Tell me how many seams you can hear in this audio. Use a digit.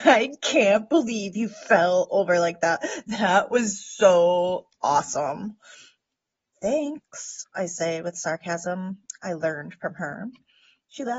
0